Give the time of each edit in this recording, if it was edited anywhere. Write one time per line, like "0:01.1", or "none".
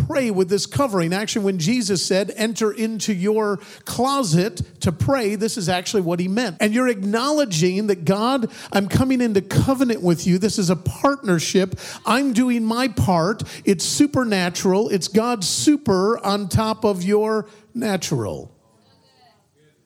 0:06.6